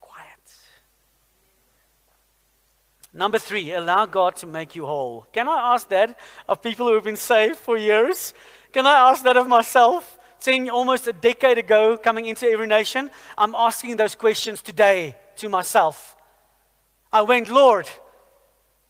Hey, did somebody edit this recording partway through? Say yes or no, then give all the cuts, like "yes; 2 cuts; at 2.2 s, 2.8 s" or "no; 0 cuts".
no; 0 cuts